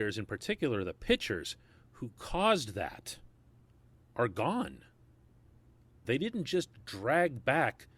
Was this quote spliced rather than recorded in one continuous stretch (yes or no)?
yes